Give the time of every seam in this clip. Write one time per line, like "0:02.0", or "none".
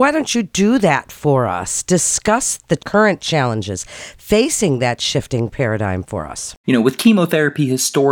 0:06.6